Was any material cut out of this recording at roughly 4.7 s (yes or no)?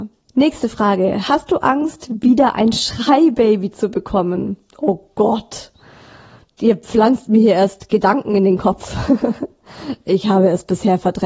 no